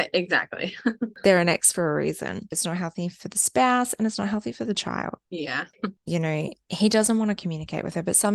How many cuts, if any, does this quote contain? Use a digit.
2